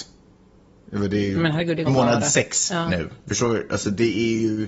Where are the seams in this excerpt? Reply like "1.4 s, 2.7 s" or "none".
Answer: 1.9 s